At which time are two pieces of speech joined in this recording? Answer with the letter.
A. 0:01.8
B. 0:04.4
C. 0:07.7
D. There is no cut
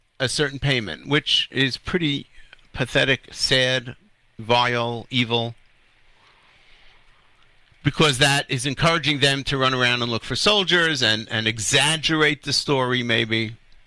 B